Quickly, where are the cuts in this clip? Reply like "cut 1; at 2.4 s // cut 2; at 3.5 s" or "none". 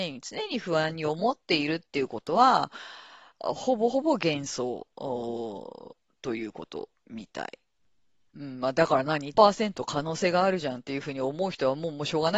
cut 1; at 8.3 s // cut 2; at 9.3 s